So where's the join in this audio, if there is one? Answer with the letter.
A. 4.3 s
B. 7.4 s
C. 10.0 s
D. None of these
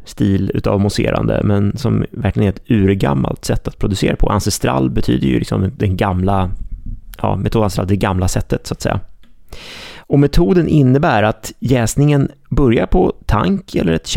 C